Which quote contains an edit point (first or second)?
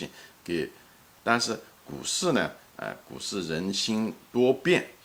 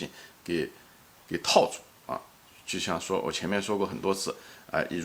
first